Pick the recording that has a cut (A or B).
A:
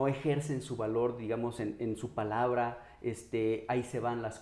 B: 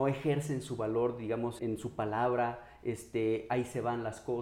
B